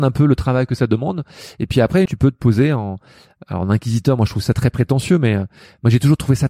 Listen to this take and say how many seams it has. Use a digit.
1